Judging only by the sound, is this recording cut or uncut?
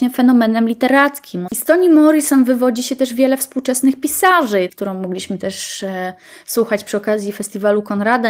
cut